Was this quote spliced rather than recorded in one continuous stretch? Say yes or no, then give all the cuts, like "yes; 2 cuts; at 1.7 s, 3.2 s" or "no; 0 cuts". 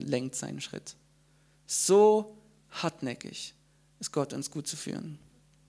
no; 0 cuts